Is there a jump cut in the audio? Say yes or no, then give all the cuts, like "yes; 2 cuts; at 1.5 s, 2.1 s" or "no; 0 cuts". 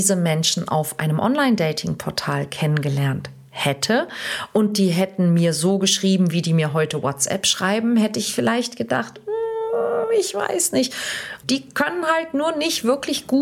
yes; 1 cut; at 11.4 s